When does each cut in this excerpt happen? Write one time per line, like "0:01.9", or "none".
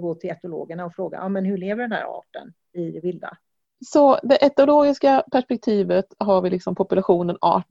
0:03.6